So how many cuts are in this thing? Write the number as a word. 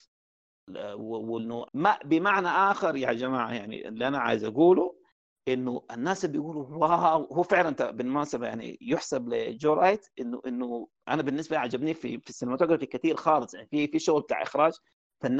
one